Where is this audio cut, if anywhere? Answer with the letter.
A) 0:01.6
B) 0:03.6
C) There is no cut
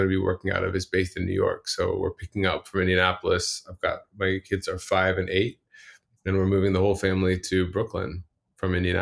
C